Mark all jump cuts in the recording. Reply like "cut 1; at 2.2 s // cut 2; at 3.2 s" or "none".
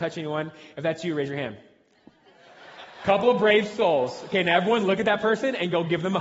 none